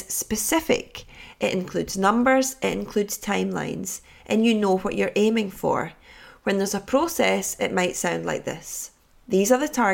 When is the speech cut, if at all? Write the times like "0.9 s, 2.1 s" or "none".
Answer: none